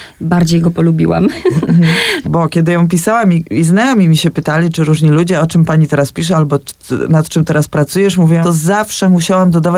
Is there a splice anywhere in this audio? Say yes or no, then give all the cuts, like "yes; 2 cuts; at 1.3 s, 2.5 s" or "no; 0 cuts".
yes; 3 cuts; at 2.2 s, 3.5 s, 8.4 s